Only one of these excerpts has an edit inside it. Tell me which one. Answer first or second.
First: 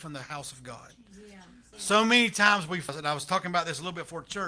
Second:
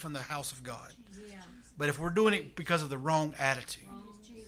first